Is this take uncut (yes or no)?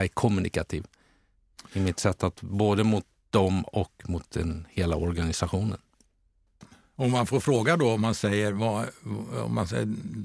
yes